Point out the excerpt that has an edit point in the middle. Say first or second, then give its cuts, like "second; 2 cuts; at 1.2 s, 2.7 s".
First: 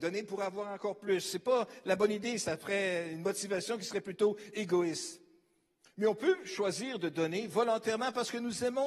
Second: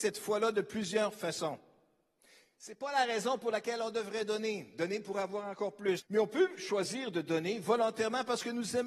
second; 1 cut; at 6.0 s